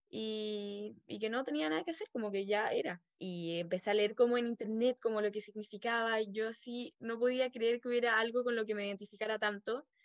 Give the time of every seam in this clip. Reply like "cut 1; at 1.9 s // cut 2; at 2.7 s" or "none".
cut 1; at 3.2 s